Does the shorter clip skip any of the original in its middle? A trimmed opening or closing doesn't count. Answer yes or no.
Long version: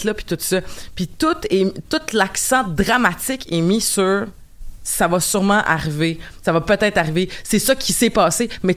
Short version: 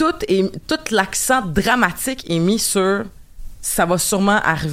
no